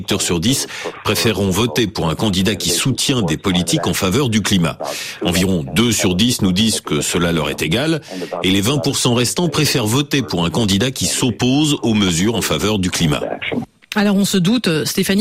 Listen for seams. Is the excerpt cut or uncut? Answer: uncut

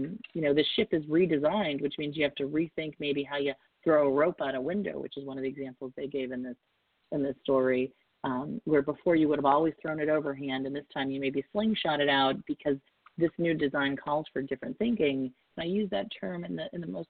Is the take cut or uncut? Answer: cut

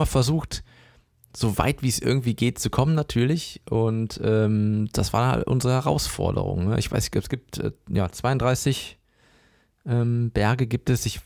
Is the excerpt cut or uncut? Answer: uncut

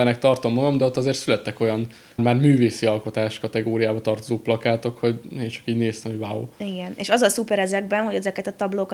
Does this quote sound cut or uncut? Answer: cut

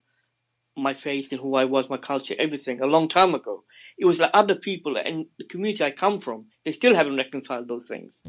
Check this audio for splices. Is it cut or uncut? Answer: cut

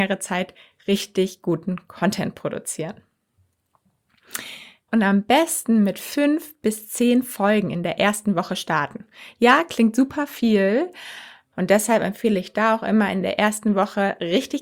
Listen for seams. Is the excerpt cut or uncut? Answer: cut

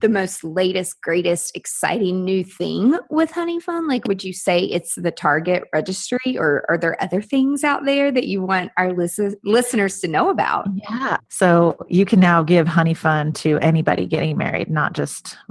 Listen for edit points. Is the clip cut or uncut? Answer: cut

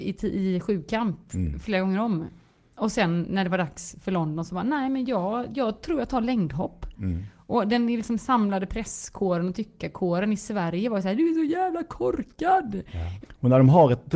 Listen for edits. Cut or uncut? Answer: cut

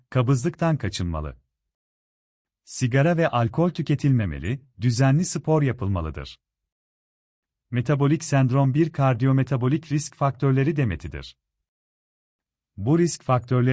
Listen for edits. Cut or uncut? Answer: cut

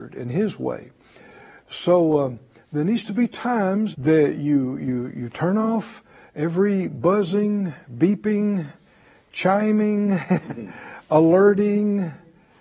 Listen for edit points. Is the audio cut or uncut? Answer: cut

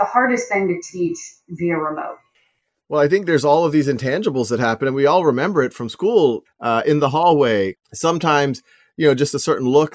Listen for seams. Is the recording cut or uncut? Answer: cut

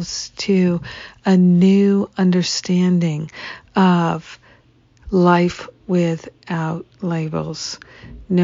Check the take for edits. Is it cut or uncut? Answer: uncut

